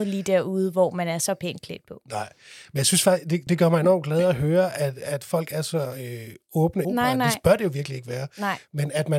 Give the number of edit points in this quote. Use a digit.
2